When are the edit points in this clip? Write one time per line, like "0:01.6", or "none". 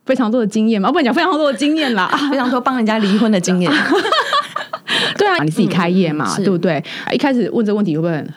0:05.4
0:07.1